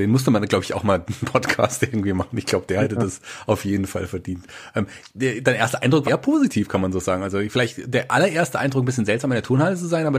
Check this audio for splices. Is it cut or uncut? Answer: cut